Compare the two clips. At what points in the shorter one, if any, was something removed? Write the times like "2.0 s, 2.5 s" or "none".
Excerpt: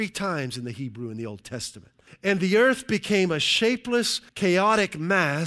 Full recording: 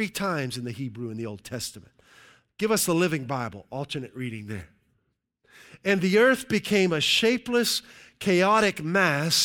2.1 s, 4.3 s